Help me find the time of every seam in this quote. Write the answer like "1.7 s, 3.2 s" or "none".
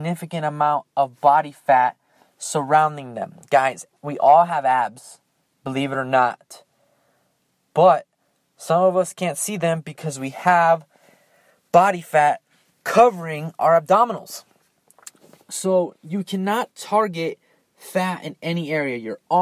none